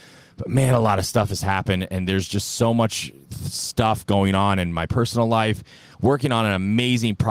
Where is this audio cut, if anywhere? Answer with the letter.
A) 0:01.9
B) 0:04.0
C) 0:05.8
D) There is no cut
D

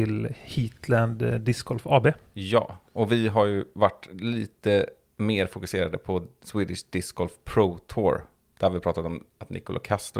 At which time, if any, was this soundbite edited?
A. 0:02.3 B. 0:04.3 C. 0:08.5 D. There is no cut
D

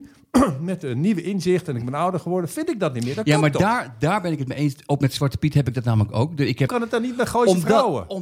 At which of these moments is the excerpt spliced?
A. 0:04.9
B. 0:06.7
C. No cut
B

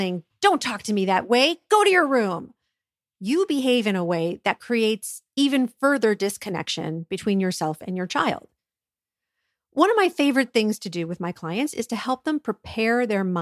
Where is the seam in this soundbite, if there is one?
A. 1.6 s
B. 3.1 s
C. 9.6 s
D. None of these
D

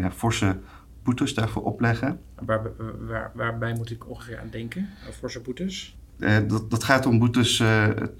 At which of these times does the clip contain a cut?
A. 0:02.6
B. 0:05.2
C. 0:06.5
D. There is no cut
D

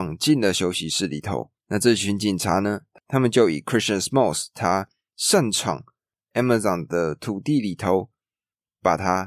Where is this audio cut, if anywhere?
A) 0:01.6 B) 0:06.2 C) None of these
C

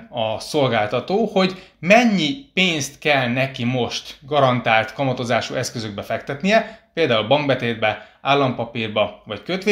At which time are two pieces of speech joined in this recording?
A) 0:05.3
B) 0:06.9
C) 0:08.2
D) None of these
D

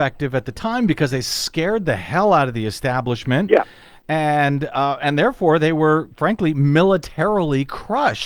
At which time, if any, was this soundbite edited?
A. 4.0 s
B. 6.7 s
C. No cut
C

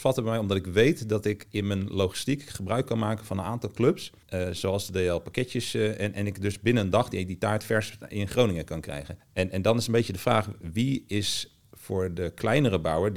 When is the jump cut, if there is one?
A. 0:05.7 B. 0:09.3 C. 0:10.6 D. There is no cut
D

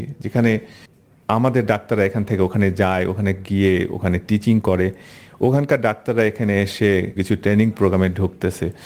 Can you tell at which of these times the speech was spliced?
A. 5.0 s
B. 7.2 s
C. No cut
B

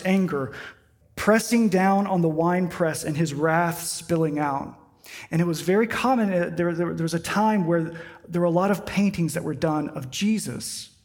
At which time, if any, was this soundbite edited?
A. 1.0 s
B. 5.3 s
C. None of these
A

